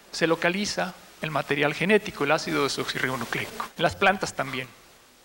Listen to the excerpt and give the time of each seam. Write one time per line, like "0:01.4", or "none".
0:03.7